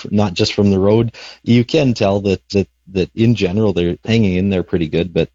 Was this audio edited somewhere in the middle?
yes; 2 cuts; at 2.5 s, 4.0 s

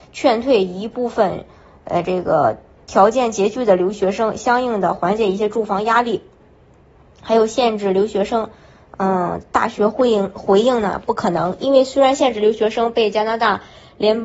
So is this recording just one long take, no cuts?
yes; 0 cuts

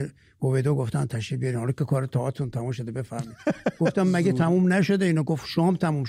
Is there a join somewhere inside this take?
no; 0 cuts

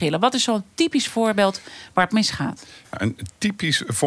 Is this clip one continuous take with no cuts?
yes; 0 cuts

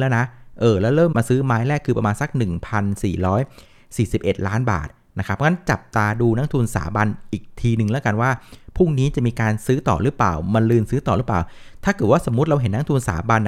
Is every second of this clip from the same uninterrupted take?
no; 1 cut; at 1.1 s

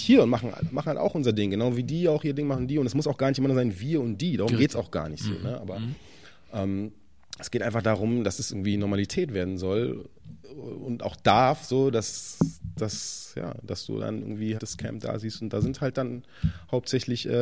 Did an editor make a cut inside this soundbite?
yes; 1 cut; at 14.6 s

